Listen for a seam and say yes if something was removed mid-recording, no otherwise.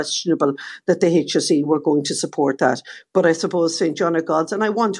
no